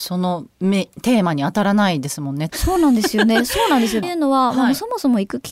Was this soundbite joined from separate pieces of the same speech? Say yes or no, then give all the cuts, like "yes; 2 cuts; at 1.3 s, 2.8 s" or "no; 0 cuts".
yes; 2 cuts; at 2.5 s, 4.0 s